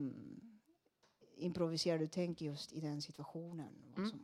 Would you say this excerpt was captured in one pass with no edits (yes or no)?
yes